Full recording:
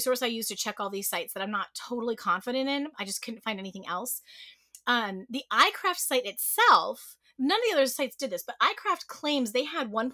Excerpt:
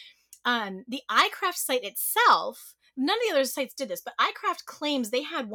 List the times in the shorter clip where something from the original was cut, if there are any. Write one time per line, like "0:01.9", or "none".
none